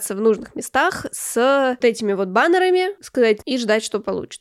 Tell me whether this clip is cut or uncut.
cut